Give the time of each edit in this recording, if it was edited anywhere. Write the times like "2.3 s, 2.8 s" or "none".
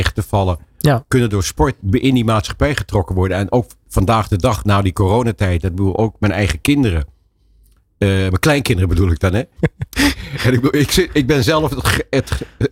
9.6 s